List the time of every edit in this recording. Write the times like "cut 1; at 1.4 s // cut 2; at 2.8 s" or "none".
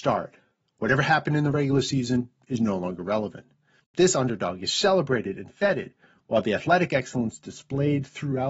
cut 1; at 3.8 s